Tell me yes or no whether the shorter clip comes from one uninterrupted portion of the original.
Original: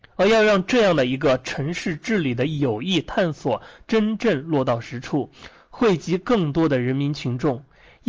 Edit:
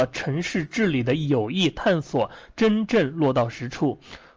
yes